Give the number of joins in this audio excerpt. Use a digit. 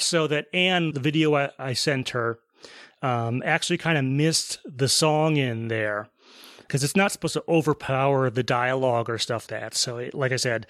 2